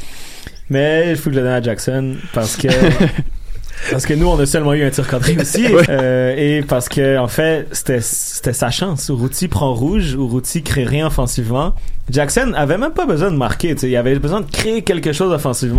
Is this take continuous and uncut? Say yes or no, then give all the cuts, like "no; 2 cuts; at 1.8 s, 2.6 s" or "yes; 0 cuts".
no; 1 cut; at 5.9 s